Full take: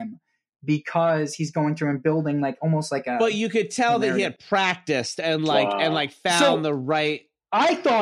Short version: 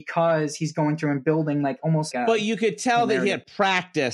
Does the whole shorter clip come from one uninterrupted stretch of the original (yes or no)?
no